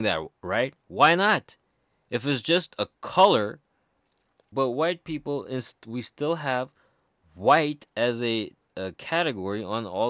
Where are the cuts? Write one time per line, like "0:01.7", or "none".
0:04.5